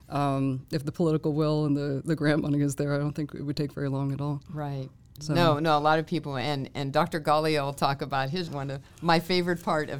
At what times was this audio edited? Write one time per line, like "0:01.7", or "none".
0:08.5